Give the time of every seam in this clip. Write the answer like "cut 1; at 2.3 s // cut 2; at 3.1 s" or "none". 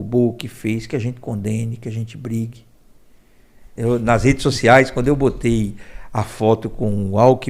cut 1; at 3.8 s

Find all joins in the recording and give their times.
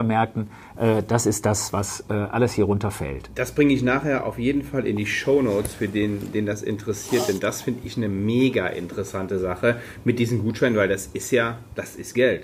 none

